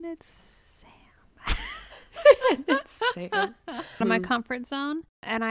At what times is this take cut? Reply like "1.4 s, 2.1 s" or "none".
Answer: 4.0 s